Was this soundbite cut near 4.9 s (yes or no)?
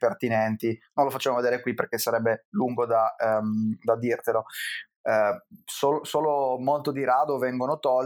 yes